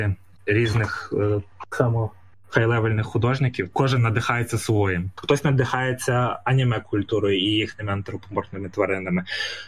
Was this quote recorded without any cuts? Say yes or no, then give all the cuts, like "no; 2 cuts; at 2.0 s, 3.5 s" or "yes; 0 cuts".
no; 2 cuts; at 3.7 s, 5.2 s